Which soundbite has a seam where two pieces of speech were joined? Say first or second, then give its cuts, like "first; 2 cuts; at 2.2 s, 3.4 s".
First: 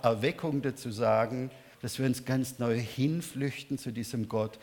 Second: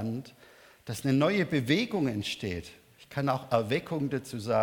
first; 1 cut; at 1.7 s